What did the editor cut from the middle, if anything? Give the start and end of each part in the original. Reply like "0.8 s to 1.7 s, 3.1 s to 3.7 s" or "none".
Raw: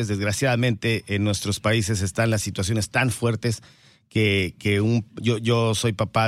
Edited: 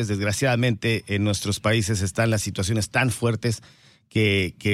none

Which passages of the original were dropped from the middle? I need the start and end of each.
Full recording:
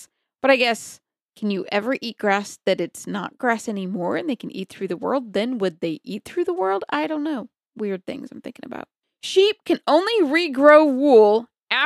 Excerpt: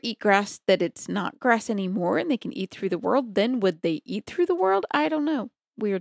none

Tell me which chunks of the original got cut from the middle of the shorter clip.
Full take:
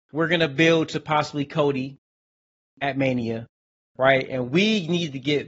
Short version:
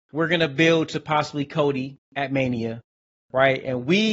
2.0 s to 2.7 s

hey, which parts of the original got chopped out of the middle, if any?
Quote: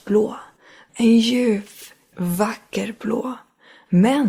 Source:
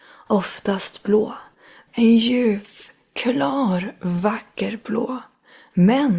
3.1 s to 4.0 s

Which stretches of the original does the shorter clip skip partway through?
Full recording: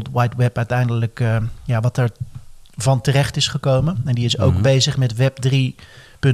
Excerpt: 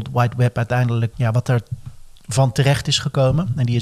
1.1 s to 1.6 s

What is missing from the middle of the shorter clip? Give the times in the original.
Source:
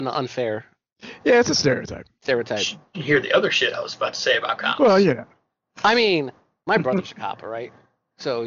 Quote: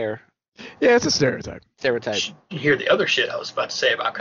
none

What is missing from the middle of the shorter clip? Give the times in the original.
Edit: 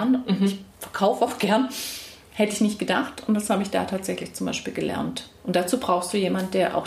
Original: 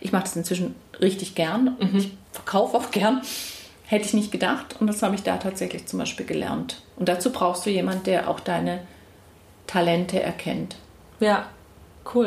none

